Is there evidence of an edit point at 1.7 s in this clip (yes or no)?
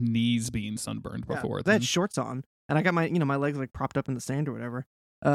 yes